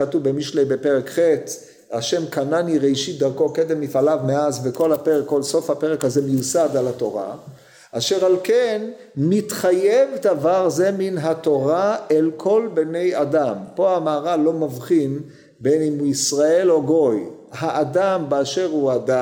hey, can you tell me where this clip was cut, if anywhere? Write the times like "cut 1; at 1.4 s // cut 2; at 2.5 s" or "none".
none